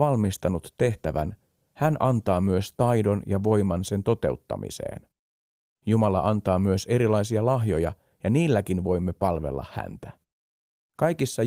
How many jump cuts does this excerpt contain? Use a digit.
0